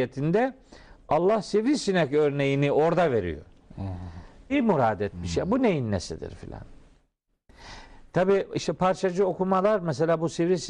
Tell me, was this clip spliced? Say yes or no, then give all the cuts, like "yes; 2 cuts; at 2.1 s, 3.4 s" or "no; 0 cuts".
yes; 1 cut; at 4.5 s